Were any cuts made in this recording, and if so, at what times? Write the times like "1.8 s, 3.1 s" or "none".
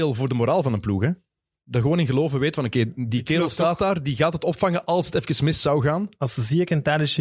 none